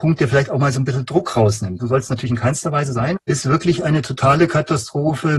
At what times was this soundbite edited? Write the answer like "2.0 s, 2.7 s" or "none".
1.8 s, 3.2 s